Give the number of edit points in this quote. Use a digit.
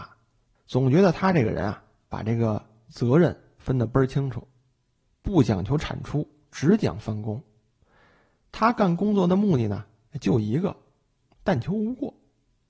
1